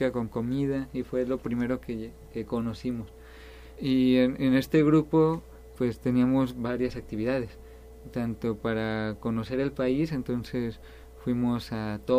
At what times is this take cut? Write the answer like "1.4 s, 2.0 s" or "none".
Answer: 3.8 s, 5.8 s